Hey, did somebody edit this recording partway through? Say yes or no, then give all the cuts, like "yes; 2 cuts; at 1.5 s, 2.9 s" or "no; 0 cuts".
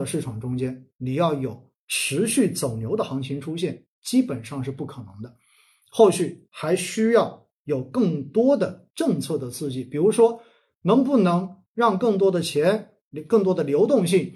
no; 0 cuts